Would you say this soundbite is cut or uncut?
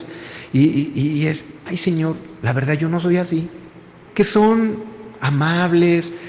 cut